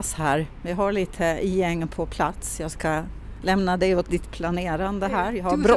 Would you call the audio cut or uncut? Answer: uncut